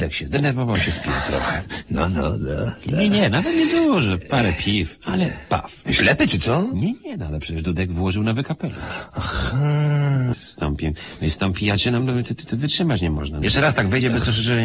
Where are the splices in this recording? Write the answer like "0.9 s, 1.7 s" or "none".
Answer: 5.8 s, 10.3 s, 13.4 s